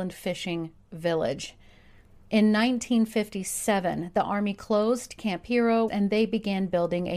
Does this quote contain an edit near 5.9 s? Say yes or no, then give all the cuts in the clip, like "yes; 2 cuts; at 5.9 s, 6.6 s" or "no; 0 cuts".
yes; 1 cut; at 5.9 s